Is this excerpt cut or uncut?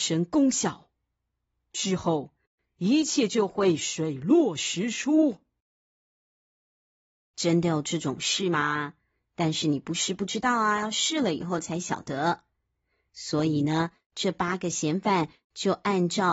uncut